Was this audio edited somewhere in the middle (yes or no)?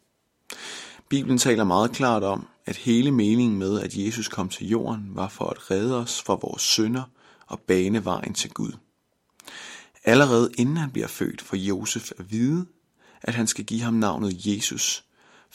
no